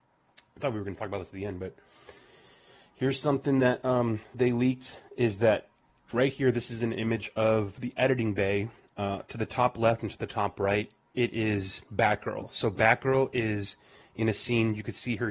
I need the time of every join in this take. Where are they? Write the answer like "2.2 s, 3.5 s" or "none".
none